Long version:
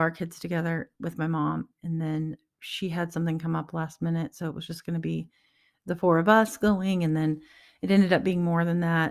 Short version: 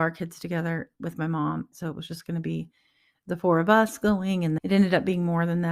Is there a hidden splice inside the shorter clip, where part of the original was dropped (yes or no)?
yes